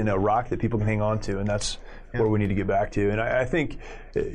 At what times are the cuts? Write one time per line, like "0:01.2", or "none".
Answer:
none